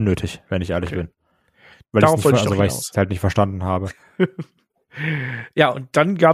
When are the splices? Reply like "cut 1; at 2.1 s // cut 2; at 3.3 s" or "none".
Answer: none